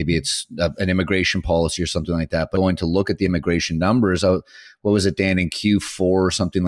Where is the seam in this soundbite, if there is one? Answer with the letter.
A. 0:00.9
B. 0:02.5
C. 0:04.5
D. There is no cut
B